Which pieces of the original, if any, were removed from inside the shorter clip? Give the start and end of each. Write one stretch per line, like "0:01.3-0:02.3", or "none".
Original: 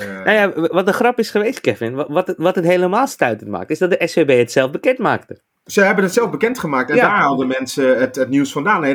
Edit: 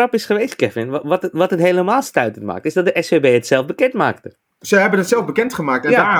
none